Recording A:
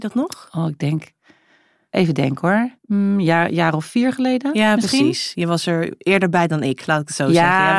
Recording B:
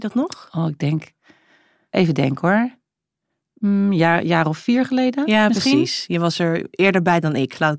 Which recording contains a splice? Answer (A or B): A